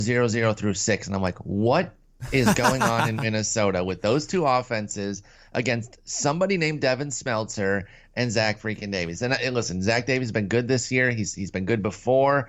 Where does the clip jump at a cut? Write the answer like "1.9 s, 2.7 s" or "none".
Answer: none